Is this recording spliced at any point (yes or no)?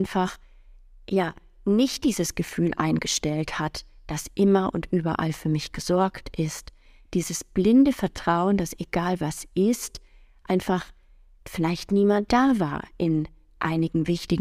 no